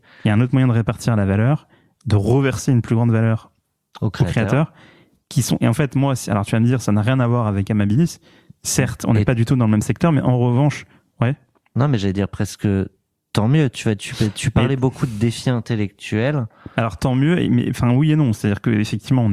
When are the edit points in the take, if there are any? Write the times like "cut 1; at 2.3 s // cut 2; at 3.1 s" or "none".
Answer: none

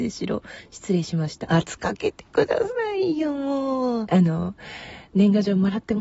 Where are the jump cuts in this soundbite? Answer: cut 1; at 1.4 s // cut 2; at 4.1 s

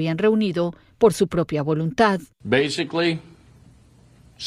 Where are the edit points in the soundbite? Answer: cut 1; at 2.3 s

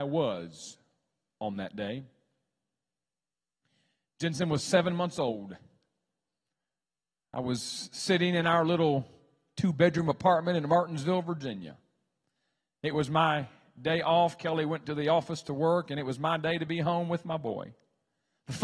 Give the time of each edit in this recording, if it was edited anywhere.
none

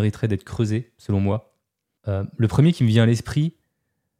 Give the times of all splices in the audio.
none

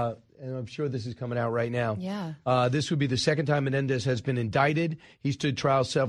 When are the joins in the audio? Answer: none

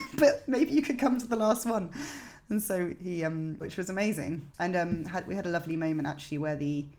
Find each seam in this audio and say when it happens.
cut 1; at 3.6 s

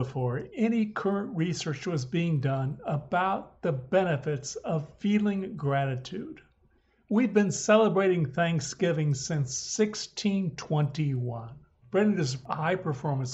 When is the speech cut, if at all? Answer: cut 1; at 11.8 s

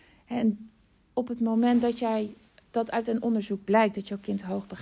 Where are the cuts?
cut 1; at 2.6 s

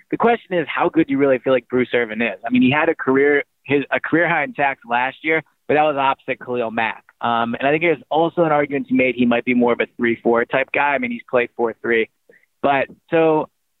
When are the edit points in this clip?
none

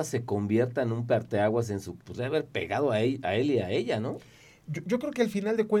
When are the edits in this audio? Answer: cut 1; at 2.0 s

